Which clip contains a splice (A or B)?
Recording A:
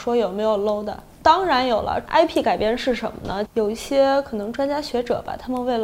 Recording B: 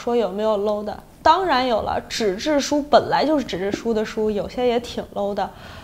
A